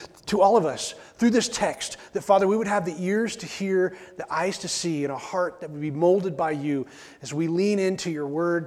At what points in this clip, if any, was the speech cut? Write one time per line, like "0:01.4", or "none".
none